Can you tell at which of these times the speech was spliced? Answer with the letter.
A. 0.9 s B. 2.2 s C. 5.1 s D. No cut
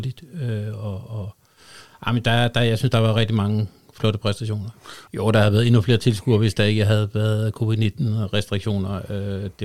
C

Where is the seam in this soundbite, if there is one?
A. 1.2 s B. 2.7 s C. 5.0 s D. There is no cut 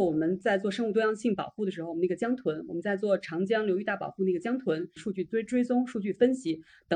C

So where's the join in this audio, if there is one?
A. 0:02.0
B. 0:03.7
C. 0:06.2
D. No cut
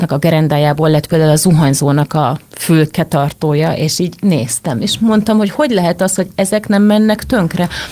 D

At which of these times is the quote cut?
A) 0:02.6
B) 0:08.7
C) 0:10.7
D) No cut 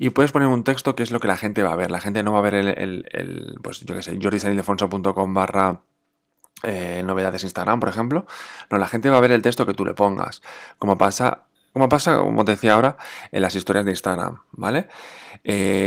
D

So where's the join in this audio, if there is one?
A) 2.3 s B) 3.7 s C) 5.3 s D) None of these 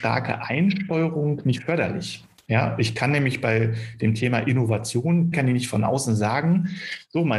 C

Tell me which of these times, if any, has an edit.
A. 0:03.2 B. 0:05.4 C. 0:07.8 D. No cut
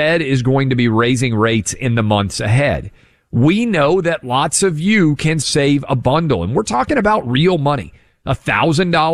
B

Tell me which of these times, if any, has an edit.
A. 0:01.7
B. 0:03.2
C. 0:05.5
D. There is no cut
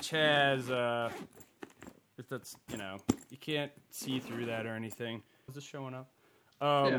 C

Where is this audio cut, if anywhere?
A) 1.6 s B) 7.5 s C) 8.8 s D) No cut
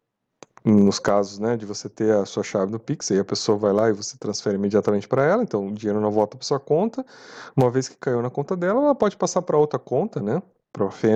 D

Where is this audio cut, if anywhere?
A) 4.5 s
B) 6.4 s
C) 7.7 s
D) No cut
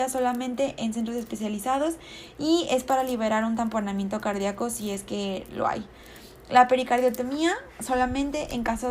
D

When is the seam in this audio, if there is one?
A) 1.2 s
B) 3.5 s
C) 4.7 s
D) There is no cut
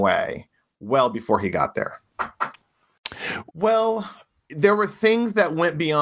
B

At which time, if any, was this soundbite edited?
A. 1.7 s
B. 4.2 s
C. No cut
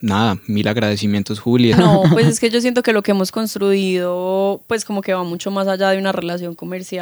A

